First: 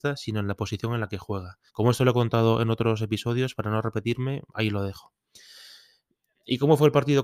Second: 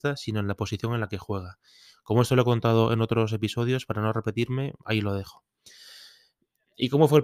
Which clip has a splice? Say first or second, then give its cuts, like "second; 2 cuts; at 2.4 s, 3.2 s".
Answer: first; 1 cut; at 1.7 s